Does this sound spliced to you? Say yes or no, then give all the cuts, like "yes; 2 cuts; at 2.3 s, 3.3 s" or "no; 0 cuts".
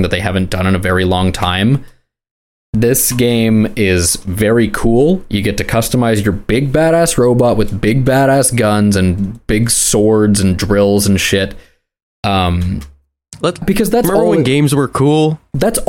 yes; 1 cut; at 13.6 s